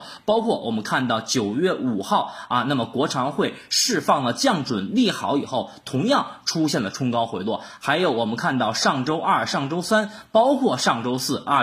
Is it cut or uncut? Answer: uncut